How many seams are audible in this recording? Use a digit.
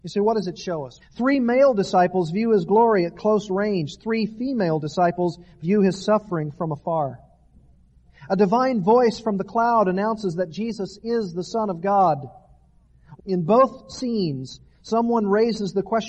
2